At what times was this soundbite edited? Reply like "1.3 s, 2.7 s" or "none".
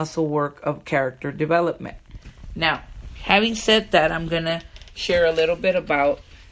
none